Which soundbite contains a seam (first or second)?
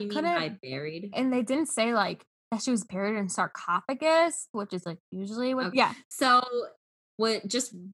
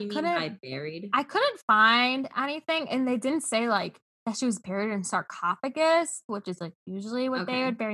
first